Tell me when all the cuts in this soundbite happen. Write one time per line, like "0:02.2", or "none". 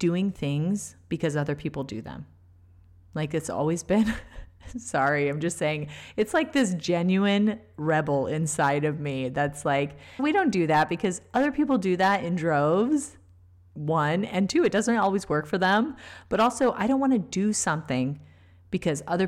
0:10.2